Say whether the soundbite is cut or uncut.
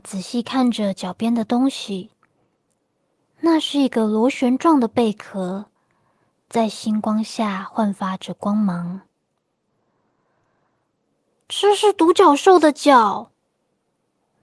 uncut